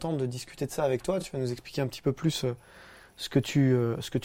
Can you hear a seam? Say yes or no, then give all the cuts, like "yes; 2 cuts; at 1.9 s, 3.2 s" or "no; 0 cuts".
no; 0 cuts